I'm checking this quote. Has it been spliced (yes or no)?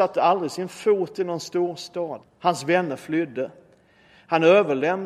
yes